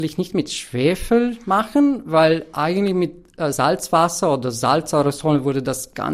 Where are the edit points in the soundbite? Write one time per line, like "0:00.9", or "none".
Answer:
none